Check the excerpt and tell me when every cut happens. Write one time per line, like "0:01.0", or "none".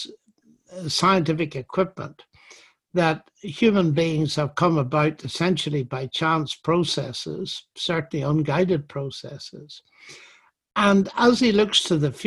none